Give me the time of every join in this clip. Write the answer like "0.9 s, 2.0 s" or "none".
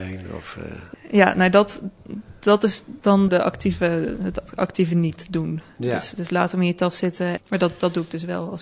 0.9 s, 3.3 s, 7.4 s